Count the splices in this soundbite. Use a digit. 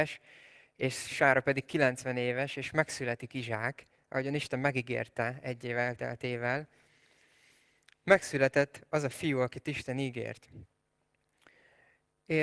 0